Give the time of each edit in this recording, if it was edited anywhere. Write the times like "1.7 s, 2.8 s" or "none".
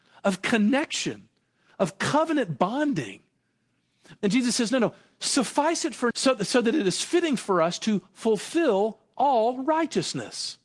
4.2 s, 6.1 s

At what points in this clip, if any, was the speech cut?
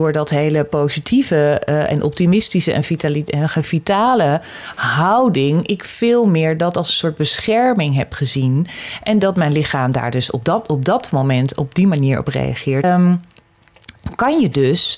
12.8 s

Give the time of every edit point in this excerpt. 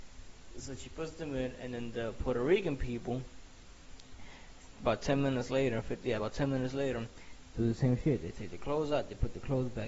none

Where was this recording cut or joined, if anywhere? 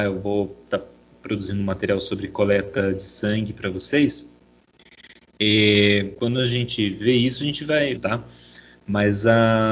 8.0 s

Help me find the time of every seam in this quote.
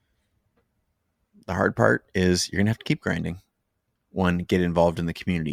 4.0 s

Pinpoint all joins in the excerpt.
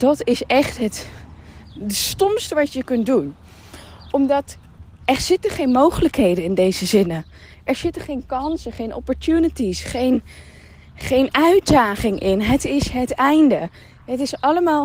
1.6 s

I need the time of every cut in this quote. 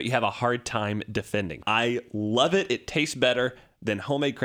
1.6 s

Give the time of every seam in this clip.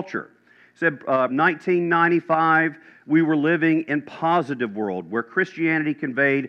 1.3 s

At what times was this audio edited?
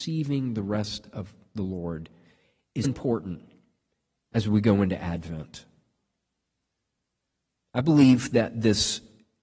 2.8 s

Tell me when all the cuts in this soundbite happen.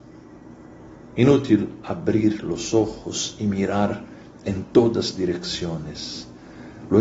none

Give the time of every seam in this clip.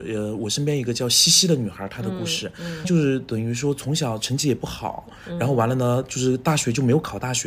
2.8 s

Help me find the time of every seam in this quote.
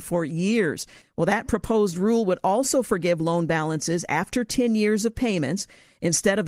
1.0 s

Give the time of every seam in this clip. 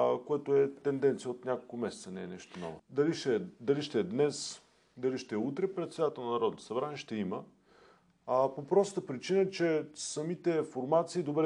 2.8 s

